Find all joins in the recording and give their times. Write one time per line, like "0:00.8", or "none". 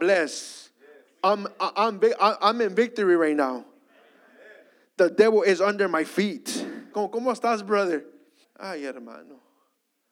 0:06.9
0:08.4